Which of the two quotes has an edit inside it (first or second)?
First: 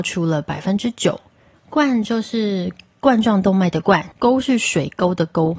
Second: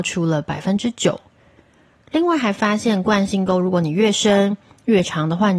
first